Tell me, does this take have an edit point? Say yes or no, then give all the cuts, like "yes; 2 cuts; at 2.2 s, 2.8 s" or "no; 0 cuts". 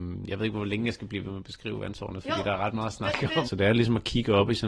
yes; 1 cut; at 3.4 s